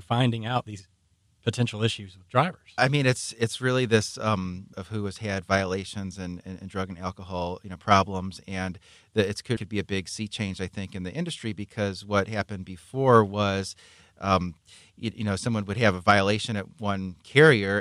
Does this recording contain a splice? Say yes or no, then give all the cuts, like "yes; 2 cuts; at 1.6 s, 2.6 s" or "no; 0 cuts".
yes; 3 cuts; at 2.8 s, 4.7 s, 9.6 s